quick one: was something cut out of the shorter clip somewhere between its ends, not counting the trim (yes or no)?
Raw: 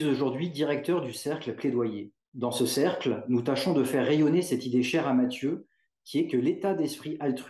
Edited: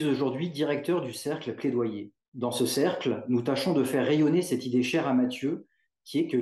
no